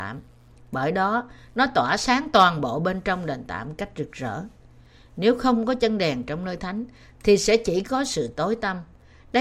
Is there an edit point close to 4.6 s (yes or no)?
no